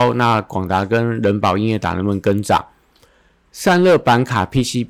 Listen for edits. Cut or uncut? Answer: uncut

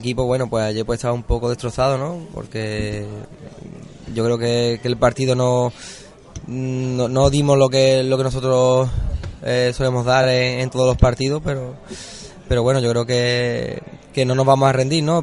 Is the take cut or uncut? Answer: uncut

